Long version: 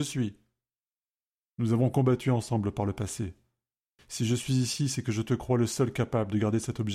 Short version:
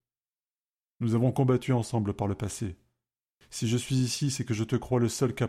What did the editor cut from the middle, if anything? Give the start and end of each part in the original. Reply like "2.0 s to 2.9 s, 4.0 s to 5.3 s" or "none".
none